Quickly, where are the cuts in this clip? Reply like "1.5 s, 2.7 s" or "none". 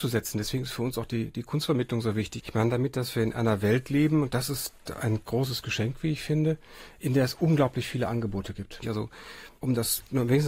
2.4 s, 8.8 s